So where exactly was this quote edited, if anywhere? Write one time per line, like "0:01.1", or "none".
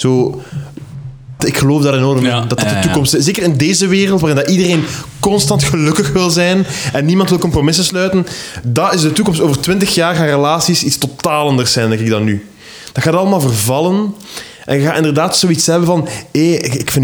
0:01.4